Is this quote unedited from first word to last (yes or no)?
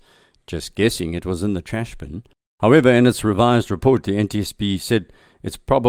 yes